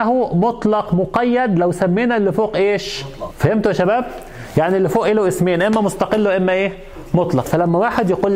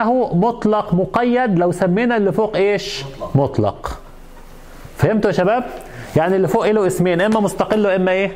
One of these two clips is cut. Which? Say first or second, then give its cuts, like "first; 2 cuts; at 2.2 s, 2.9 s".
first; 2 cuts; at 3.3 s, 7.4 s